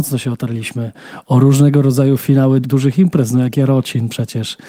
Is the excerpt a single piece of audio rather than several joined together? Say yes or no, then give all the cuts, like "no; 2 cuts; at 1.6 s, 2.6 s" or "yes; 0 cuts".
no; 1 cut; at 2.6 s